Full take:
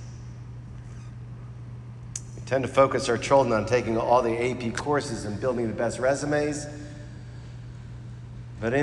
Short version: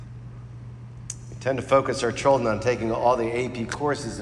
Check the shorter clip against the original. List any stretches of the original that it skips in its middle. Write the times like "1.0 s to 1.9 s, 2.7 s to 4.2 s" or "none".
none